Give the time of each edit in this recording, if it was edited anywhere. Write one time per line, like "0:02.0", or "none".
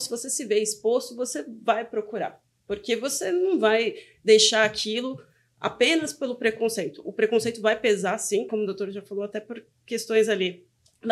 0:08.5